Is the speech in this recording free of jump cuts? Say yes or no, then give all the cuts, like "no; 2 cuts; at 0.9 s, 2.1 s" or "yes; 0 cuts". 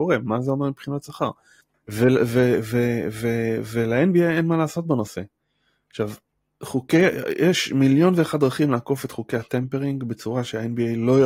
yes; 0 cuts